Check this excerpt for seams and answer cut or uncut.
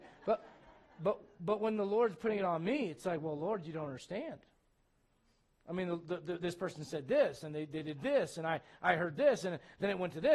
uncut